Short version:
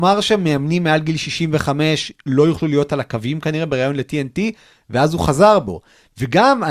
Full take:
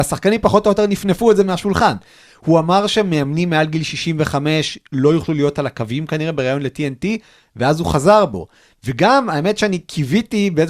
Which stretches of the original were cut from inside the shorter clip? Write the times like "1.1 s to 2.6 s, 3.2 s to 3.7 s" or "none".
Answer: none